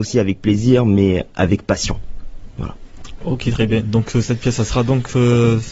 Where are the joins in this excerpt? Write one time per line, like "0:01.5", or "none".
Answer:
none